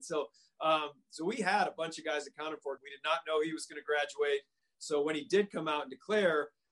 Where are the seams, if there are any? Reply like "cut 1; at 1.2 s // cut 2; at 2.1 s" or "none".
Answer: cut 1; at 2.8 s // cut 2; at 4.7 s